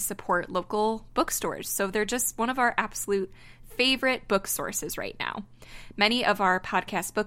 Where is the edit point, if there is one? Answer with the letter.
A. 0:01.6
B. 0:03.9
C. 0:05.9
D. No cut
D